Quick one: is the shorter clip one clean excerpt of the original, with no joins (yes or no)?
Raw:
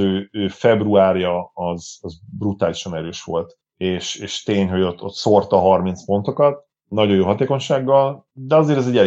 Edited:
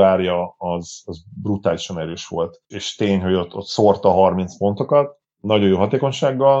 no